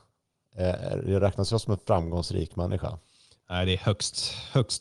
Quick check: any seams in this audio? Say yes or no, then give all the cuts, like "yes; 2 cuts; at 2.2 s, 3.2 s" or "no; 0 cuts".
no; 0 cuts